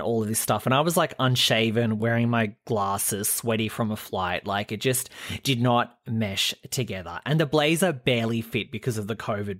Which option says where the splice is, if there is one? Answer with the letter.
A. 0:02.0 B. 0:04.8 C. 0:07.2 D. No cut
D